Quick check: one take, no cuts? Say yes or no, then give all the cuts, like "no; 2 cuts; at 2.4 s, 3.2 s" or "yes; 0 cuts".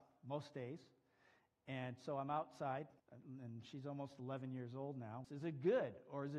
no; 2 cuts; at 3.0 s, 5.2 s